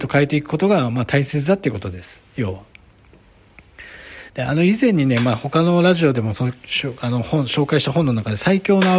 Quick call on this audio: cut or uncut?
cut